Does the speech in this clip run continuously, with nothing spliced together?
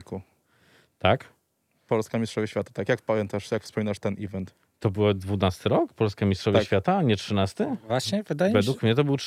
yes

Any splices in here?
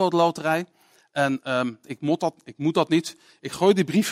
yes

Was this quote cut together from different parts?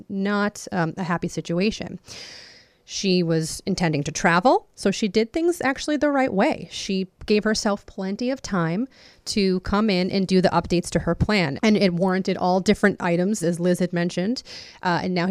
yes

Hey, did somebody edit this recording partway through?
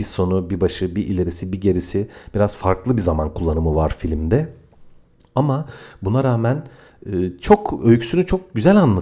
no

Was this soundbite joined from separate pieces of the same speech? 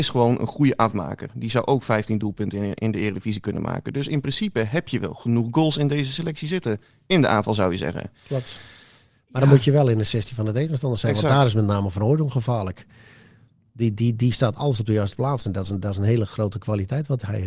no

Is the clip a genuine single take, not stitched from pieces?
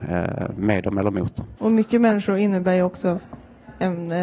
no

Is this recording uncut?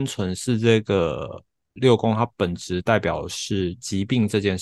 no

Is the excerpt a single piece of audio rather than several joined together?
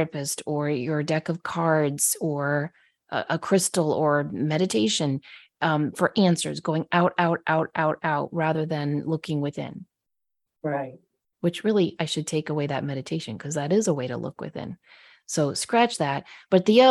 yes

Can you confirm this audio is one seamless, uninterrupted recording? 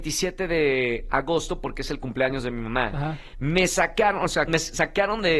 no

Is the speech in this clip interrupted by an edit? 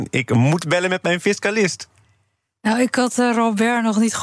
no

